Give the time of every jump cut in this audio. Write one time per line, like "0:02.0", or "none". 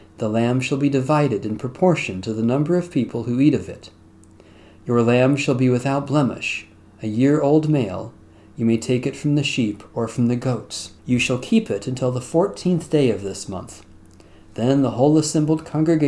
0:11.0